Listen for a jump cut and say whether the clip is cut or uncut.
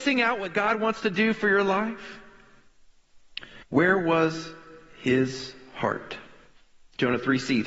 cut